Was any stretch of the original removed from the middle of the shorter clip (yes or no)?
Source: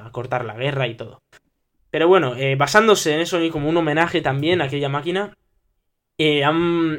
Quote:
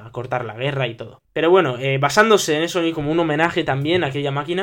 yes